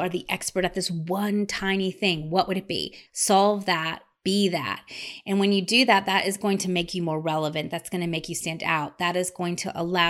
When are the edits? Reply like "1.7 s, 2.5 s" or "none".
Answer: 3.1 s